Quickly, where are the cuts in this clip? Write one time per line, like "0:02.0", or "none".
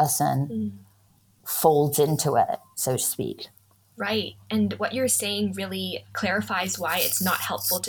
none